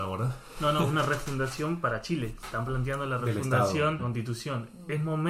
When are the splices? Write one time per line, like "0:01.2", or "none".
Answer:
0:04.0